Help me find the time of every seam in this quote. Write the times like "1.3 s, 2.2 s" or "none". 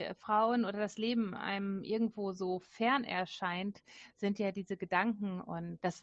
none